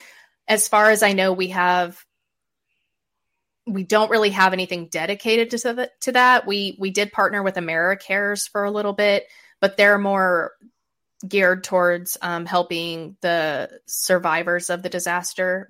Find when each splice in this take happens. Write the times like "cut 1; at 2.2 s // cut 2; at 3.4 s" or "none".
none